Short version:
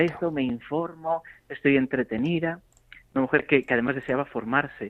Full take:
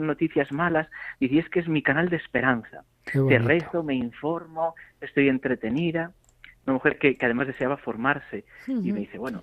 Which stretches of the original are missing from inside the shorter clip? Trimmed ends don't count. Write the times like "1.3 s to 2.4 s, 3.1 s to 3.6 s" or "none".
none